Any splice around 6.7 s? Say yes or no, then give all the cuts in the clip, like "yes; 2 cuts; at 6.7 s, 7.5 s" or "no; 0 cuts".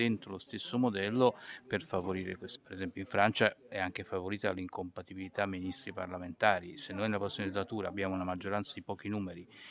no; 1 cut; at 2.6 s